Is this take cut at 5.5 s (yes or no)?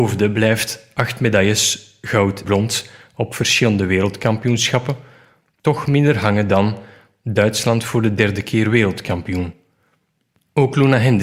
no